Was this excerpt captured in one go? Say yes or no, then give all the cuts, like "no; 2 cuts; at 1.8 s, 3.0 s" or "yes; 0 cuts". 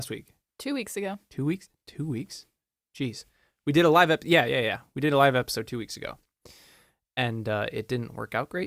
yes; 0 cuts